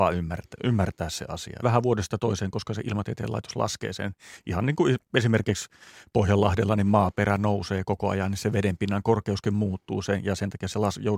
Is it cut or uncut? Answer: cut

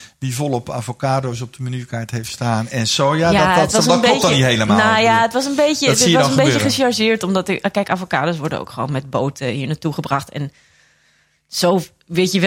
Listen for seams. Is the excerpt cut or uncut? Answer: uncut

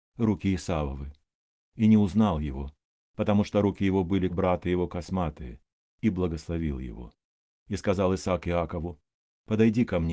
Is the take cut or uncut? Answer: cut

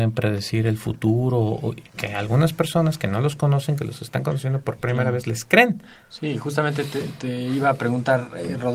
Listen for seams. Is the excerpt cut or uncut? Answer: cut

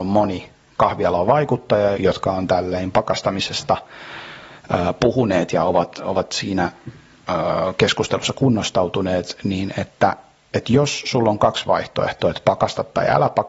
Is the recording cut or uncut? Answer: cut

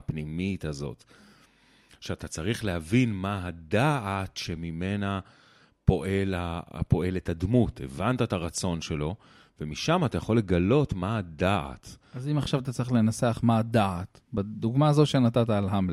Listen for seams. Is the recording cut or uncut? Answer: uncut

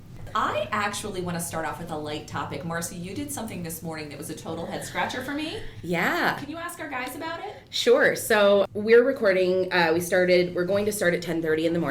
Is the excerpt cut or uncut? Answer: uncut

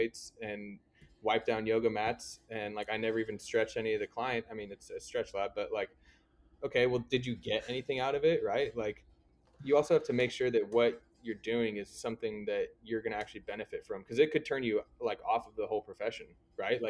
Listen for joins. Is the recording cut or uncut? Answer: uncut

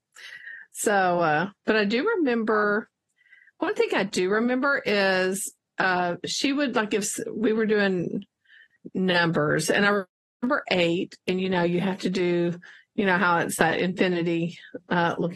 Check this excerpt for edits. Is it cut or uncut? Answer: uncut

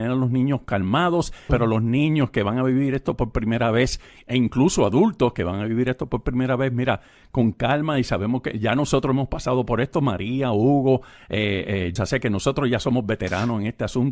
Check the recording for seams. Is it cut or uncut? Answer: cut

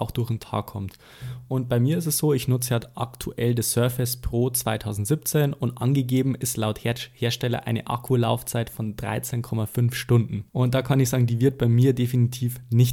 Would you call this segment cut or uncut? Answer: cut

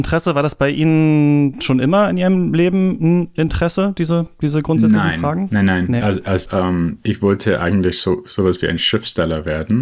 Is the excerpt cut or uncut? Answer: cut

